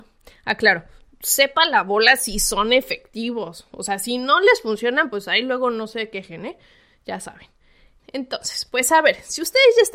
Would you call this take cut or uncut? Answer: uncut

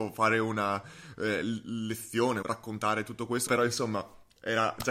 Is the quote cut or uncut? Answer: cut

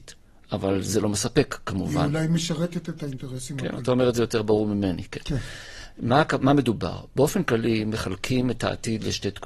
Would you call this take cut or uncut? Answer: cut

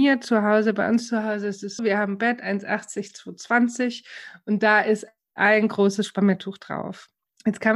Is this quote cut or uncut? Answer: cut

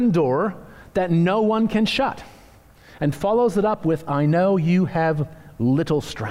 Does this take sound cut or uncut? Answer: uncut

